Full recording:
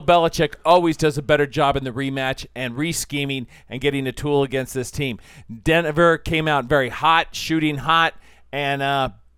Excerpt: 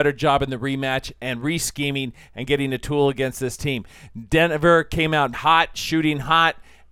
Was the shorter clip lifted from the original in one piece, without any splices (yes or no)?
no